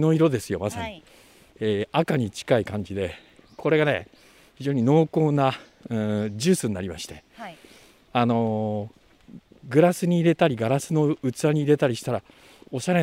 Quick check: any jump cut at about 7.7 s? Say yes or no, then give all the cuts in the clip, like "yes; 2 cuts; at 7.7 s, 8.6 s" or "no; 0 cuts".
no; 0 cuts